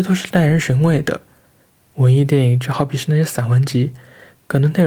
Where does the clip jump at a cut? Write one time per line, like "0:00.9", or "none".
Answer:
none